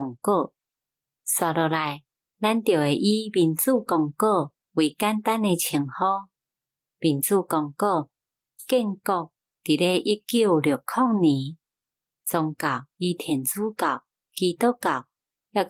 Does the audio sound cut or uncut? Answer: uncut